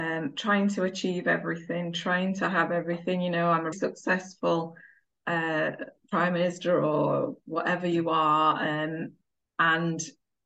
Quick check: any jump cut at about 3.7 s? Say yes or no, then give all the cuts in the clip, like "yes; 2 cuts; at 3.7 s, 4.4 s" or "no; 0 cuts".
yes; 1 cut; at 3.7 s